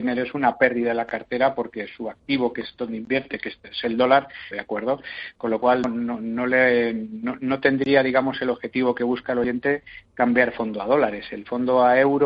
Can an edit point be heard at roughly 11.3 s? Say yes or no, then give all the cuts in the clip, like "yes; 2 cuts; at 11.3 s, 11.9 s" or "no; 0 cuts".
no; 2 cuts; at 4.5 s, 5.8 s